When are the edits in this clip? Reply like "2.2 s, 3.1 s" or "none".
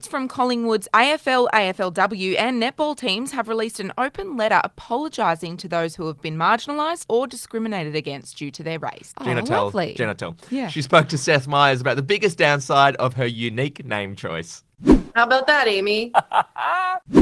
7.0 s, 9.1 s, 15.1 s